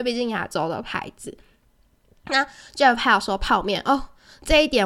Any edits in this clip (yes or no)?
no